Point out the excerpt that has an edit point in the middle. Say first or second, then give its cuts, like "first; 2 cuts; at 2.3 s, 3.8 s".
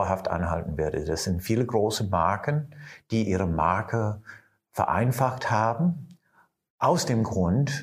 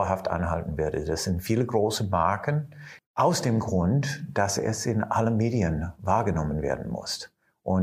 second; 1 cut; at 3.0 s